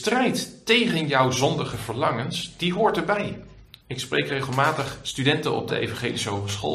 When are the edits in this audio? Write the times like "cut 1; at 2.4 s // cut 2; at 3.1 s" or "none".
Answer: cut 1; at 3.8 s // cut 2; at 5.7 s

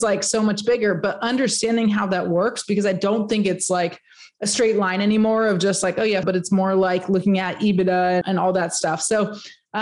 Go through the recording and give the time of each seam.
cut 1; at 6.2 s // cut 2; at 8.2 s

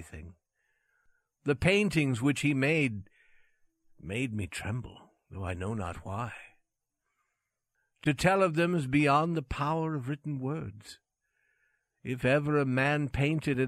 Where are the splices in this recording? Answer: none

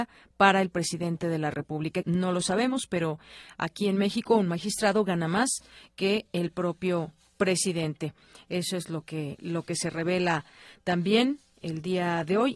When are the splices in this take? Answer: cut 1; at 2.0 s

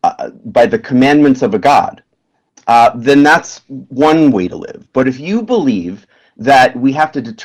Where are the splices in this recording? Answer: none

